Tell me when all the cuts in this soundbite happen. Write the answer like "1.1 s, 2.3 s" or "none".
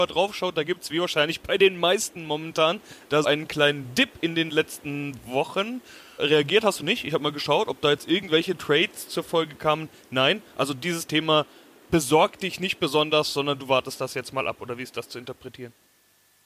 3.2 s